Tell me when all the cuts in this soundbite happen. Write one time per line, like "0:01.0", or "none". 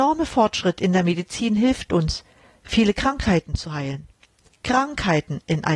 0:04.5